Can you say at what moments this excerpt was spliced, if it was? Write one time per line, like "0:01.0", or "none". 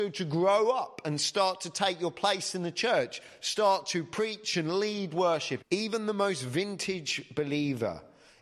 0:05.6